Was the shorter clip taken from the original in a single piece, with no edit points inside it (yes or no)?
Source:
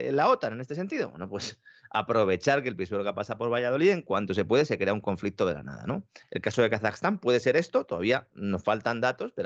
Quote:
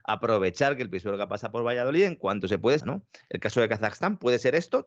no